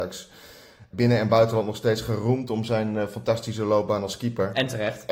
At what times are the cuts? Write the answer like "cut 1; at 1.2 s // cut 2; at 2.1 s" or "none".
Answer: cut 1; at 0.9 s